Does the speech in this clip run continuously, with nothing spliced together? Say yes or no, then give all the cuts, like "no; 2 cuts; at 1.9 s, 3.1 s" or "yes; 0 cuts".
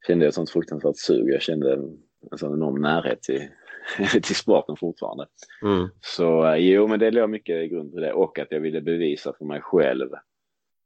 yes; 0 cuts